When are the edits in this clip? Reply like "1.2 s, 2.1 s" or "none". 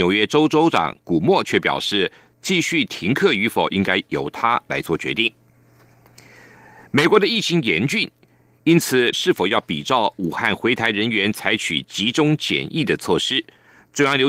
9.1 s